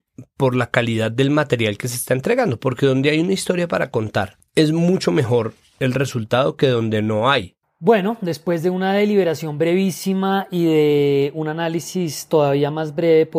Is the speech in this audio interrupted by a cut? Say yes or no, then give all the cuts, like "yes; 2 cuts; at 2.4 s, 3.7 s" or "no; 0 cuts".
yes; 1 cut; at 7.6 s